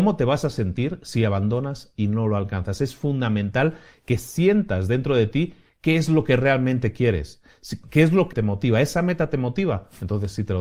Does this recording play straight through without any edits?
no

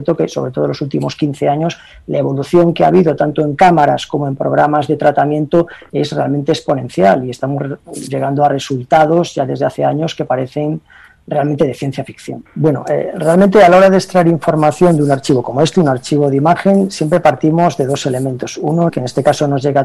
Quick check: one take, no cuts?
no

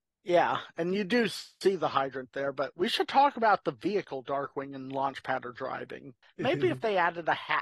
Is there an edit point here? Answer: yes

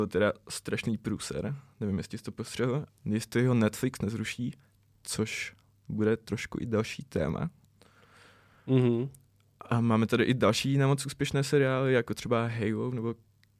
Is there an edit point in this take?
yes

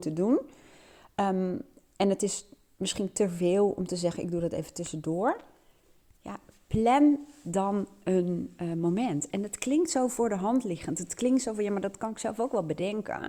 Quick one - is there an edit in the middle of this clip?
no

